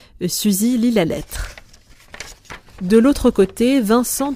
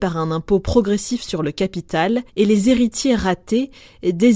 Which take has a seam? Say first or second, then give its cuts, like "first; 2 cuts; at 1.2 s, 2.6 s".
second; 1 cut; at 2.3 s